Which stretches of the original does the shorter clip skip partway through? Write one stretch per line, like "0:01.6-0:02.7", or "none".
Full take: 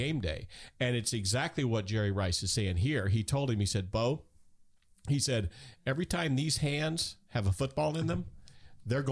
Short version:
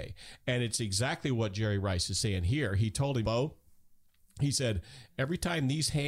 0:03.6-0:03.9